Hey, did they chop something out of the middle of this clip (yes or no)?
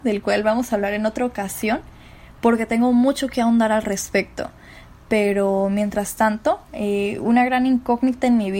no